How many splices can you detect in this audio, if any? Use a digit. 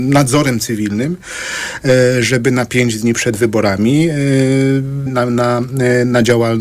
1